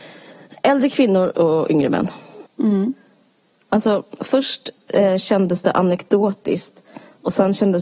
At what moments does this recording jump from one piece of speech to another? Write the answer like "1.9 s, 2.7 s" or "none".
2.5 s